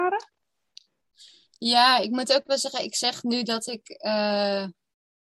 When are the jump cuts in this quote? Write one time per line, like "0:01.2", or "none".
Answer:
none